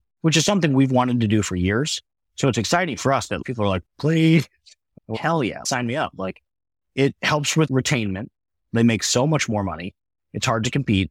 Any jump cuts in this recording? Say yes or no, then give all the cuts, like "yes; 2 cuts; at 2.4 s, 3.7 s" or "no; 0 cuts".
yes; 1 cut; at 5.1 s